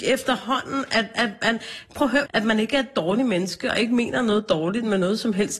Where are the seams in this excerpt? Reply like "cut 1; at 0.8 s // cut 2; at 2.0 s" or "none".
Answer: cut 1; at 2.3 s